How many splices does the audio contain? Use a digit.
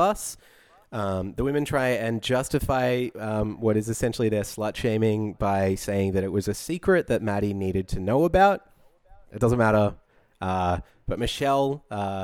1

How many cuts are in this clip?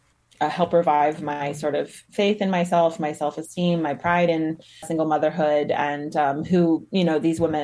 1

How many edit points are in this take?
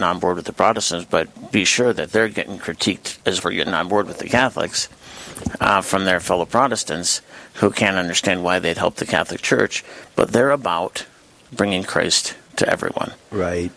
1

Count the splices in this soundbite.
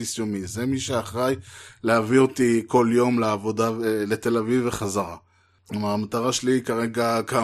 1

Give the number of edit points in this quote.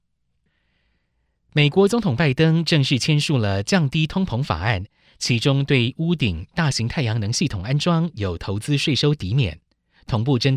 0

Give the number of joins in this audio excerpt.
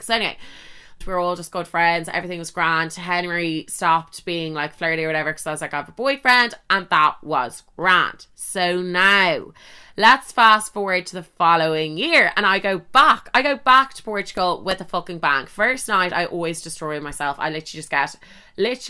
1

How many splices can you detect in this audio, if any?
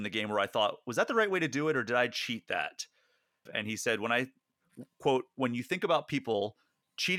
1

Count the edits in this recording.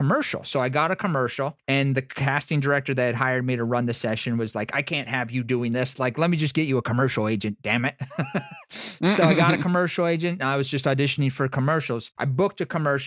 0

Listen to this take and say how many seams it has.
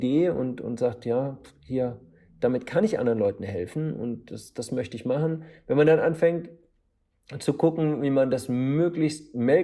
0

